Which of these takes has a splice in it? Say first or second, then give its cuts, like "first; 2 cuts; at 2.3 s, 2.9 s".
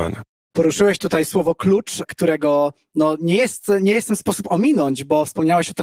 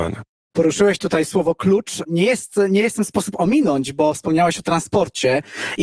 second; 1 cut; at 2.1 s